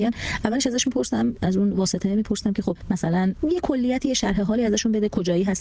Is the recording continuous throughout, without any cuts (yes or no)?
yes